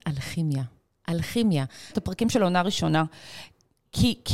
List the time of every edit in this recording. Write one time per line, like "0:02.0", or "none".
0:01.9